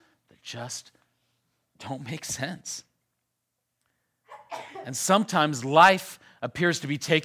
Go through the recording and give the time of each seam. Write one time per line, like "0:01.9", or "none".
none